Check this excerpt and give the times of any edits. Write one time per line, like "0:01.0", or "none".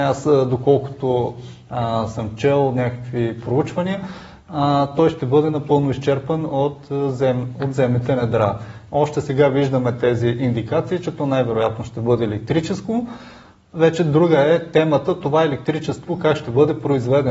0:08.9